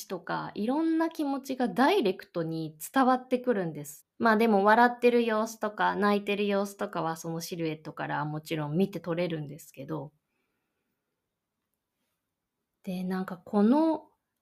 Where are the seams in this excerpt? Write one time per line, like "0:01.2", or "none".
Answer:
0:04.0